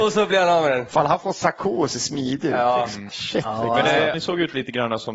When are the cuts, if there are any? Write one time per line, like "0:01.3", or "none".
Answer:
0:03.1
0:04.1